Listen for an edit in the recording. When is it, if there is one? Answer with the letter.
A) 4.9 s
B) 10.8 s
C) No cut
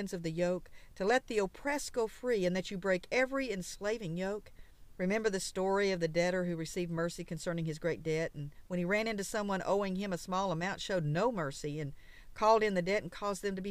A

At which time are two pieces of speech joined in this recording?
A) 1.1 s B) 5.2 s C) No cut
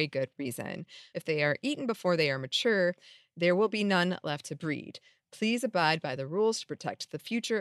A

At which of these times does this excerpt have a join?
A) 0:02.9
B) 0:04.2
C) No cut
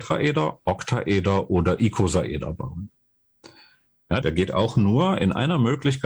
B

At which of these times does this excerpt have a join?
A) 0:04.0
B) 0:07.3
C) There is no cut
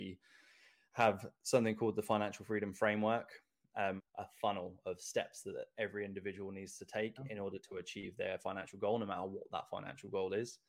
A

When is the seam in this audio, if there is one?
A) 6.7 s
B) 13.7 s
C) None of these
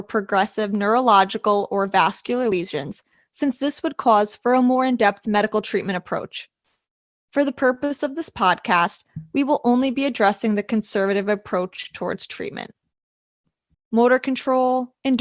B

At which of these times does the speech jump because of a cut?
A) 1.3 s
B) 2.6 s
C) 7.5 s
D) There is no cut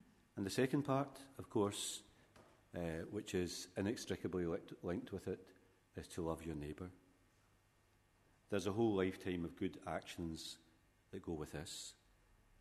D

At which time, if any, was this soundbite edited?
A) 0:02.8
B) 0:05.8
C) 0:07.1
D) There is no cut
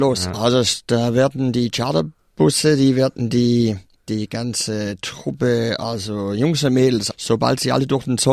C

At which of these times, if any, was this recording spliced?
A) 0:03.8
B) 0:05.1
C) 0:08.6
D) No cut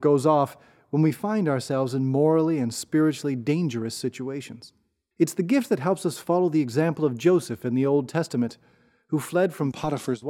B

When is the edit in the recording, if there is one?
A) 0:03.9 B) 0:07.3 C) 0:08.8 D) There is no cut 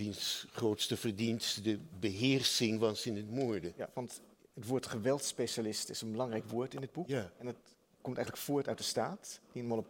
A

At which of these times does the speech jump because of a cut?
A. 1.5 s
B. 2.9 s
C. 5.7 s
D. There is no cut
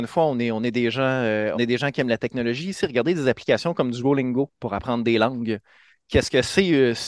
A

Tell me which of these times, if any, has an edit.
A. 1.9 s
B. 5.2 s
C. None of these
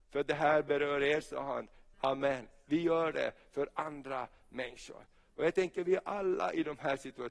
A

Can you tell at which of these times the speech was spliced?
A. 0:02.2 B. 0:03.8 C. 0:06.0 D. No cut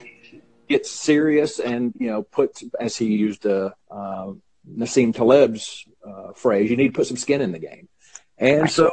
B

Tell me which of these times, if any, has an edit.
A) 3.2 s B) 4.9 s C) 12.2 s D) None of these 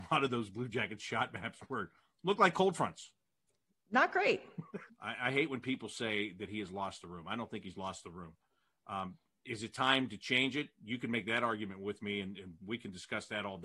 B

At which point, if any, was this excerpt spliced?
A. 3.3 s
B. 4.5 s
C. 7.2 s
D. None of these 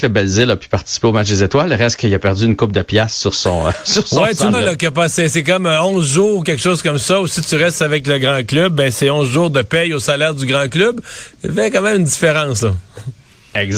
B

